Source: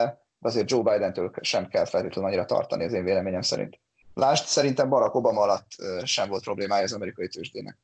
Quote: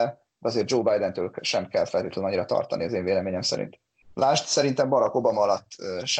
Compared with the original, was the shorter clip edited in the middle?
no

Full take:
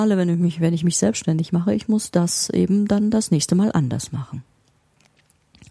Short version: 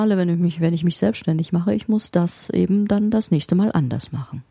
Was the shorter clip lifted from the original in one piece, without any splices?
yes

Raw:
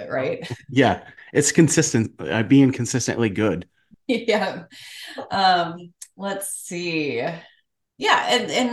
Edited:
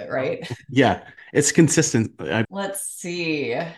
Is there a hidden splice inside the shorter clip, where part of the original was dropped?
yes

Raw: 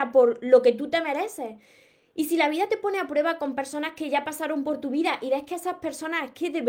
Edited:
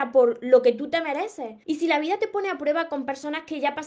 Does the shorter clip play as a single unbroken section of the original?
no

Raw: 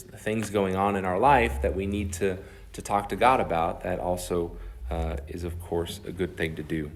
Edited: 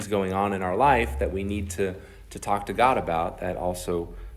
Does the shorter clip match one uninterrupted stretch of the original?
yes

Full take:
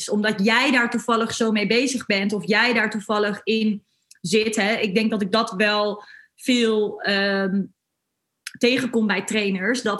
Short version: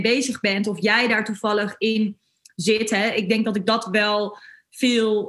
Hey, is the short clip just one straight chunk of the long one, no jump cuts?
yes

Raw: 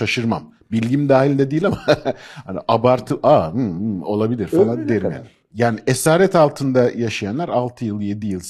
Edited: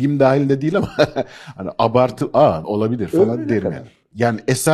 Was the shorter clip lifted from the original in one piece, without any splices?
no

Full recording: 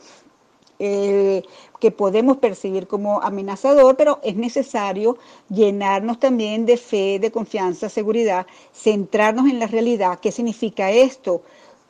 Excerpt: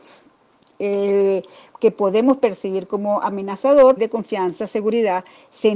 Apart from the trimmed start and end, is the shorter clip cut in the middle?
yes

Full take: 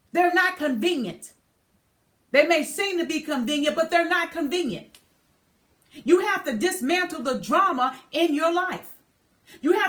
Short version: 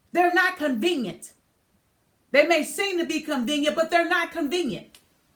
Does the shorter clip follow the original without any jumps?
yes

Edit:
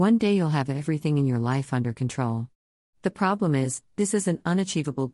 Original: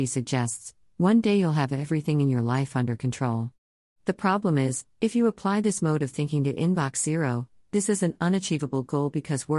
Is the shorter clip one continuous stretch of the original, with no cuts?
no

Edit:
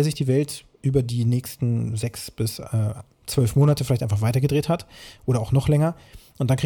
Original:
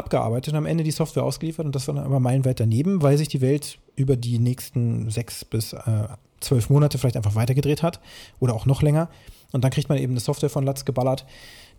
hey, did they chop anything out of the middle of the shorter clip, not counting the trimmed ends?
no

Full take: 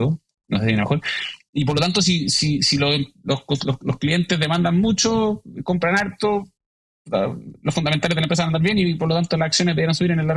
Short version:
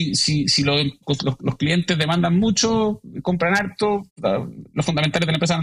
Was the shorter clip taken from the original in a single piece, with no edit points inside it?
no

